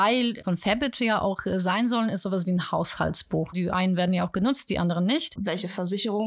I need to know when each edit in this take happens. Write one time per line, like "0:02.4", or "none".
0:03.5
0:05.4